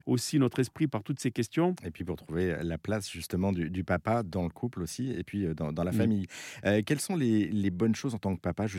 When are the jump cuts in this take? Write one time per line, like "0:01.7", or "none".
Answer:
0:01.8